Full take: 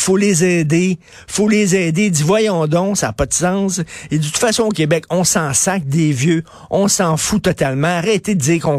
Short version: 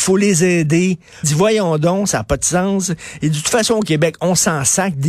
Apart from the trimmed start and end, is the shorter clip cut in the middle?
yes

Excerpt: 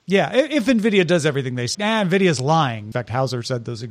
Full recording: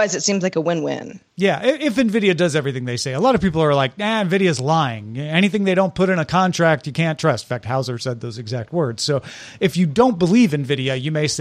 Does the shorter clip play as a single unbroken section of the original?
no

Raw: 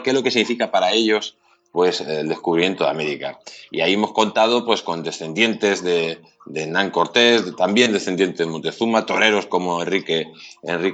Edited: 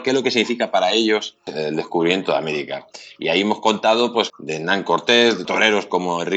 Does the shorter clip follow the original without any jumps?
no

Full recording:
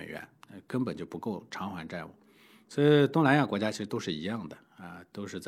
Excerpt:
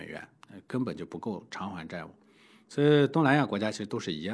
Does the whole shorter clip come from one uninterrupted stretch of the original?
yes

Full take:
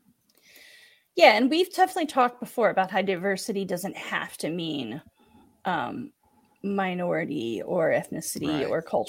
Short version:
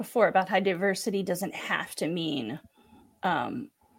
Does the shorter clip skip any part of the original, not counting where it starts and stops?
no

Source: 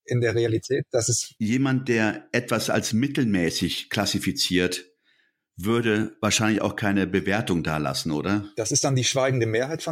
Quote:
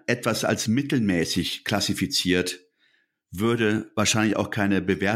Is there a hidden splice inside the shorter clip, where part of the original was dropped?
no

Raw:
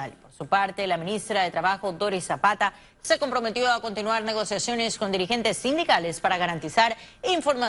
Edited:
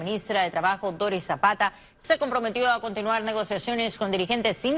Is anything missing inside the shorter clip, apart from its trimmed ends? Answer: no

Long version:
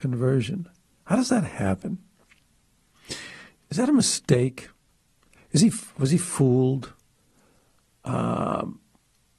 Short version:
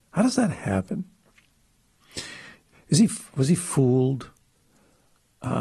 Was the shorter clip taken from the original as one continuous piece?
no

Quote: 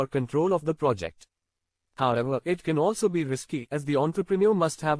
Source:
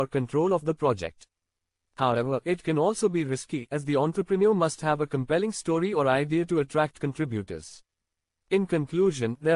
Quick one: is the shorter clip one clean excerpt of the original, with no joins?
yes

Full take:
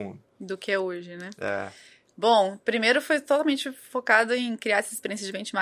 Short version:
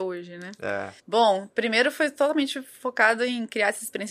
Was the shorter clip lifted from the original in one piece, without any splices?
no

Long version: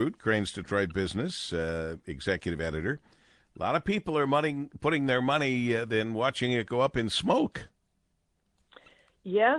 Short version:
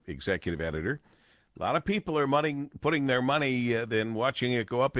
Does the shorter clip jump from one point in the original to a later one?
no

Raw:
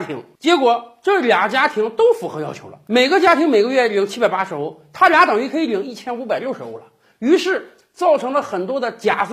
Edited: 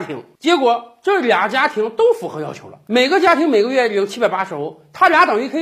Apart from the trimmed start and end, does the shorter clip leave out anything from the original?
no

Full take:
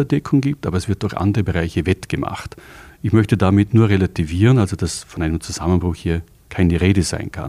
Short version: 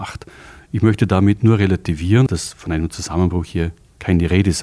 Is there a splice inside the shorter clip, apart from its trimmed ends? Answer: yes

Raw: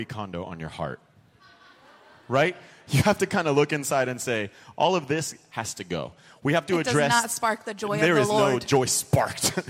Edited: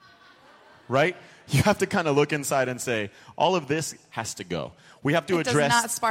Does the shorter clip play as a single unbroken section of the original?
yes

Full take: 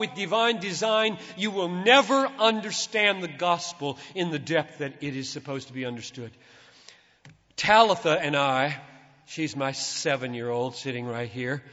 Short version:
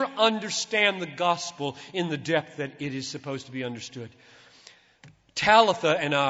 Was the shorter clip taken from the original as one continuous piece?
yes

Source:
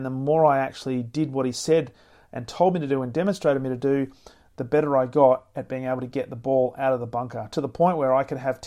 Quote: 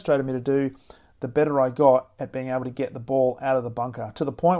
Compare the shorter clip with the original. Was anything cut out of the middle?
no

